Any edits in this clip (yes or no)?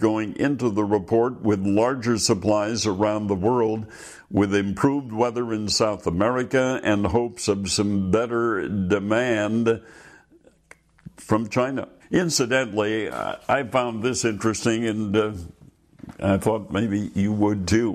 yes